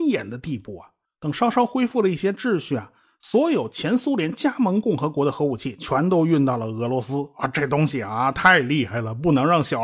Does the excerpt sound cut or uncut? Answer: cut